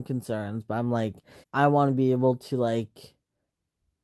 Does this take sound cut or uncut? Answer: cut